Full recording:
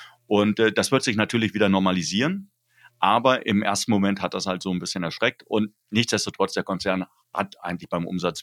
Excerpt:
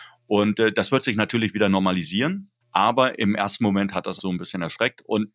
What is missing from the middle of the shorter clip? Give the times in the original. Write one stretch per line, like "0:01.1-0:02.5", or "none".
0:02.6-0:02.9
0:04.5-0:04.6